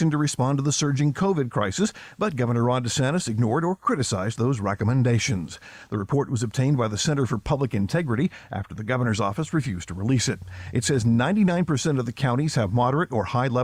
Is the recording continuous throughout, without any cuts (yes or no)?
yes